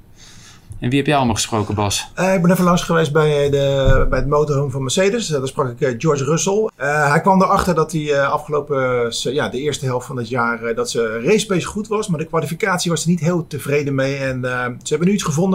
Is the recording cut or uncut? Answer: uncut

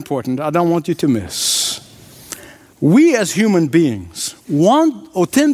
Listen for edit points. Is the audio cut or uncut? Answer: cut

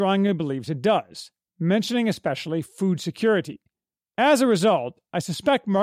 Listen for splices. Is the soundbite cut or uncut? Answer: cut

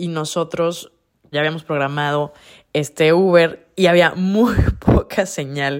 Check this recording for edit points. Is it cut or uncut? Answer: cut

